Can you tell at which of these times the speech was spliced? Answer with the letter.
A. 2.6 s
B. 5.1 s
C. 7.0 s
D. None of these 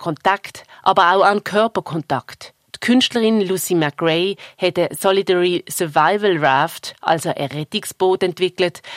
D